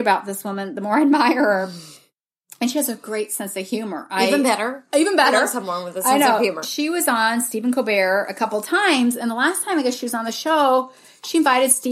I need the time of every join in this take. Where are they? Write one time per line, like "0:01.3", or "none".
none